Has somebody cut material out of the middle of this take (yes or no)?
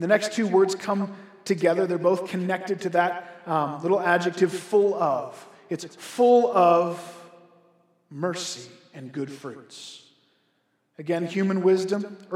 no